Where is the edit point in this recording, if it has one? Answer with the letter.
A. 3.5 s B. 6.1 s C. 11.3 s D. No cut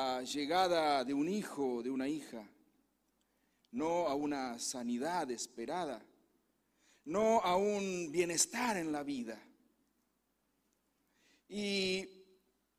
D